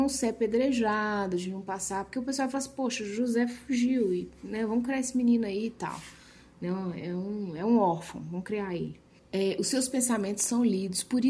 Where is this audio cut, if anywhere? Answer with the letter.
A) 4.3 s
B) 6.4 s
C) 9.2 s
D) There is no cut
C